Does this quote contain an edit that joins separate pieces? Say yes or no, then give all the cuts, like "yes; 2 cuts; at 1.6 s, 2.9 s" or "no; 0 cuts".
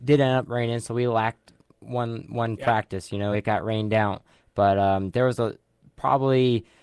no; 0 cuts